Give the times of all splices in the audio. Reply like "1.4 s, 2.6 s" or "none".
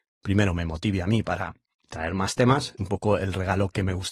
2.8 s